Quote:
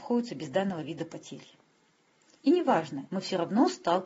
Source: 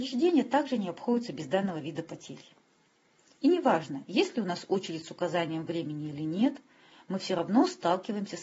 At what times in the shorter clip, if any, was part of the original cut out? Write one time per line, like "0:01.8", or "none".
0:03.1